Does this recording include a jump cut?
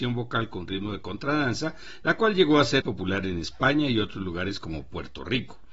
yes; 1 cut; at 2.8 s

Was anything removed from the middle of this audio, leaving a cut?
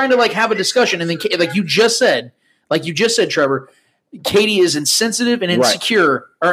no; 0 cuts

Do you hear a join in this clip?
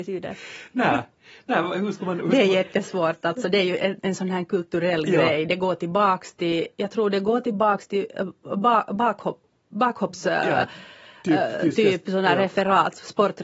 no; 0 cuts

